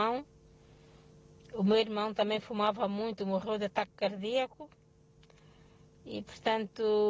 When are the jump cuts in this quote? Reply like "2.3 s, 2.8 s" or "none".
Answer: none